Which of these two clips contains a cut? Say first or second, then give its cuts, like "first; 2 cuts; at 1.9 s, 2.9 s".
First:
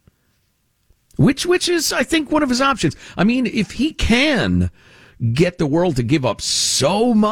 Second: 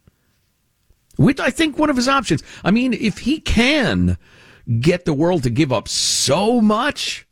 second; 1 cut; at 1.4 s